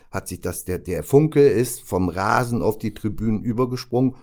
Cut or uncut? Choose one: uncut